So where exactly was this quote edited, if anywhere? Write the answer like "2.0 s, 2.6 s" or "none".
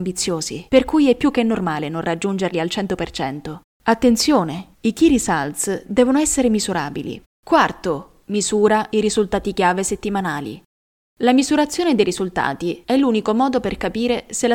3.6 s, 7.2 s